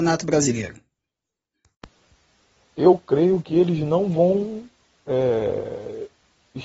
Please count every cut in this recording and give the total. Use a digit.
1